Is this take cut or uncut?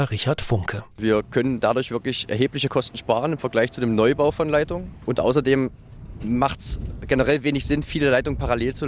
cut